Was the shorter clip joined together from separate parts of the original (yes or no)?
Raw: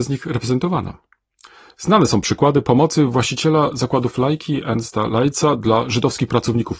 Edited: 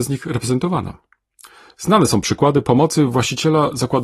no